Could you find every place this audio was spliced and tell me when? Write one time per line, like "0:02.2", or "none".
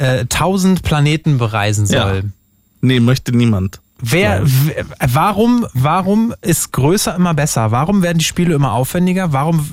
none